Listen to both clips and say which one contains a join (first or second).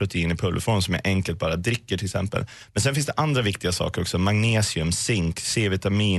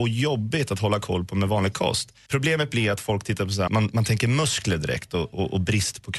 second